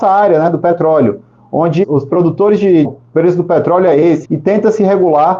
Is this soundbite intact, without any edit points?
no; 3 cuts; at 1.8 s, 2.8 s, 4.2 s

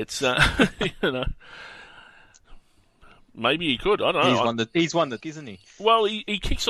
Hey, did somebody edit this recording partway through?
yes; 1 cut; at 5.2 s

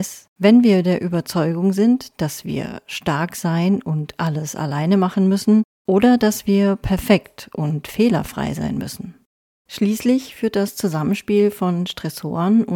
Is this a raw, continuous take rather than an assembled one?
no; 1 cut; at 9.6 s

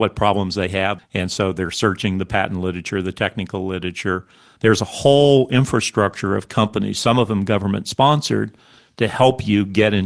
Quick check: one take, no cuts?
no; 2 cuts; at 1.0 s, 4.6 s

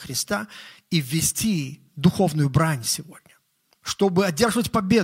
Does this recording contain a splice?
no; 0 cuts

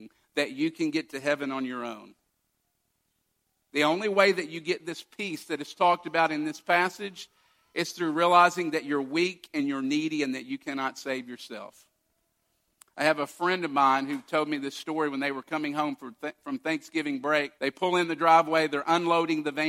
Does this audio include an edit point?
yes; 1 cut; at 17.6 s

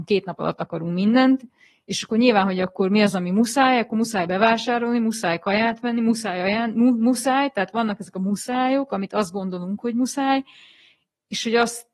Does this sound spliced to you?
no; 0 cuts

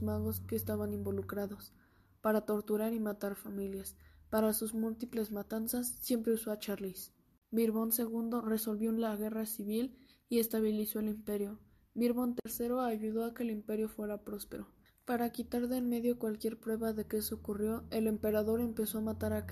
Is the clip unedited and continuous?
no; 2 cuts; at 7.4 s, 14.9 s

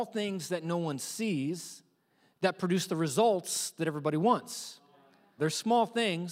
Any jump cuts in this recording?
yes; 1 cut; at 5.4 s

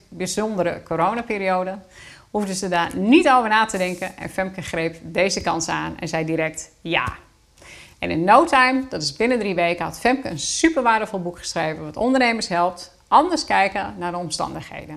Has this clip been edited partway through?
no; 0 cuts

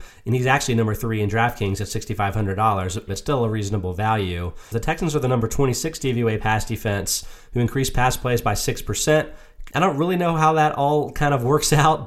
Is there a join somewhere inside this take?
yes; 3 cuts; at 3.1 s, 4.7 s, 9.7 s

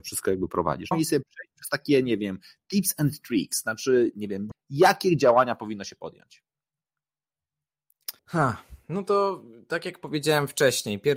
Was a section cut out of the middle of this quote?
yes; 3 cuts; at 0.9 s, 4.5 s, 8.2 s

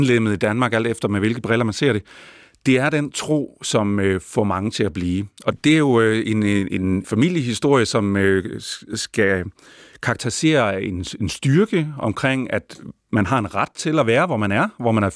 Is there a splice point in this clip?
no; 0 cuts

